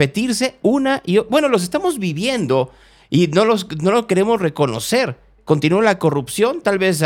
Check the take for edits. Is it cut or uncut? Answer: uncut